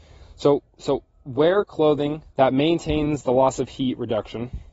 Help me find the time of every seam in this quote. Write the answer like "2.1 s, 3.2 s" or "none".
2.3 s